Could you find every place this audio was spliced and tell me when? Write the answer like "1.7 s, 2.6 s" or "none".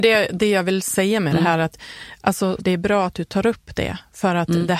2.6 s